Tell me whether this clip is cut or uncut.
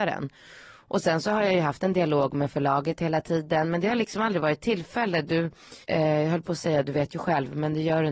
cut